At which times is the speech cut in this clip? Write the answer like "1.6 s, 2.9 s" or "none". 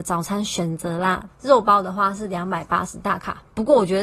1.3 s